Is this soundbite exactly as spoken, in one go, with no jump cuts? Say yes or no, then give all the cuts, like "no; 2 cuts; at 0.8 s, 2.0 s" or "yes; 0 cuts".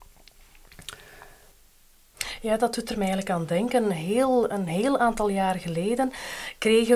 yes; 0 cuts